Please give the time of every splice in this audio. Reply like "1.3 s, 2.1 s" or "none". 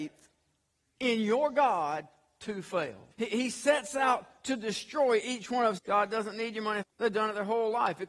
3.1 s, 5.8 s, 6.8 s